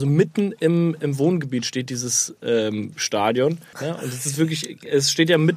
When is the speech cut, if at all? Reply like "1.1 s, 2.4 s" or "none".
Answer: 3.7 s